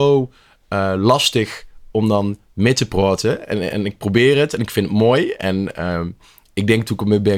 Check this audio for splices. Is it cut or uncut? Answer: uncut